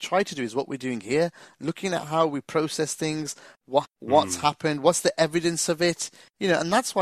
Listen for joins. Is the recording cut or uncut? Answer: cut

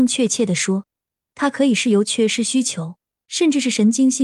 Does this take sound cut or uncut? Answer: uncut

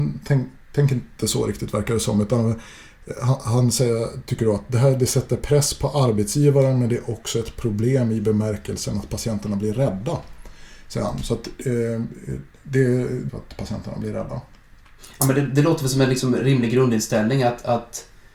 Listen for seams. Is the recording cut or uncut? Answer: cut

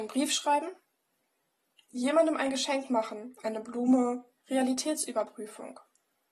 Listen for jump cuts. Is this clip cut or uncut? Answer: cut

